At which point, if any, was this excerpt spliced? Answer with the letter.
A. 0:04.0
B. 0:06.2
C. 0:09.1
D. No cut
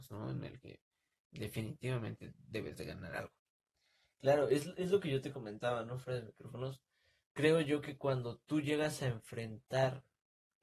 D